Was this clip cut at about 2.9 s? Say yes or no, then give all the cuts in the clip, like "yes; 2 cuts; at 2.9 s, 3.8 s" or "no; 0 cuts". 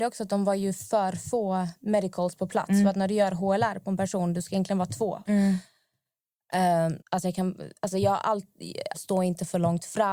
no; 3 cuts; at 5.3 s, 7.0 s, 8.9 s